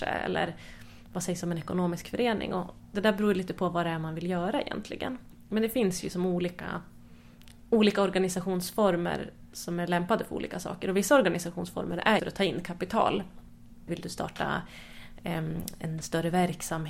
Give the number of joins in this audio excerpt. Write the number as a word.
two